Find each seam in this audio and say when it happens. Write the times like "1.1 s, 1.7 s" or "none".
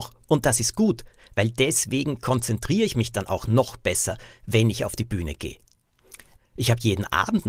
6.4 s